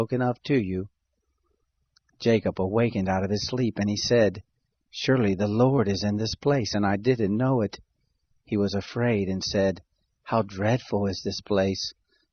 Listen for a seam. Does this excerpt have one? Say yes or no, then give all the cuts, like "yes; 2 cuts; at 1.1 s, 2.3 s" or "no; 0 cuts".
no; 0 cuts